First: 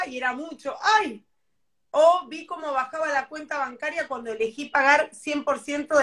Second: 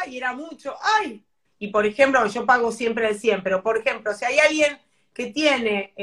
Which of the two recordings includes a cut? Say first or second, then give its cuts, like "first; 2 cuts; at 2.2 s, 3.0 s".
second; 1 cut; at 1.4 s